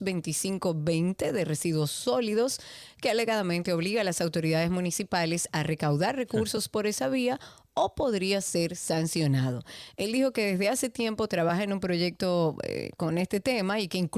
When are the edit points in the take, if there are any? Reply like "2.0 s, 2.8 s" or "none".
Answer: none